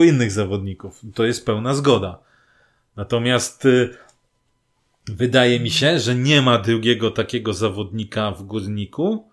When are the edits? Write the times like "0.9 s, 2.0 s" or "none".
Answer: none